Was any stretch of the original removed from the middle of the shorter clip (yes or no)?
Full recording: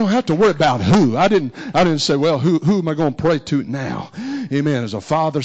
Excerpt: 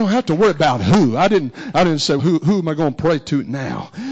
yes